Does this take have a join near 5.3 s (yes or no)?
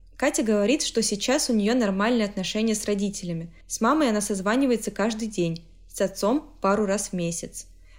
no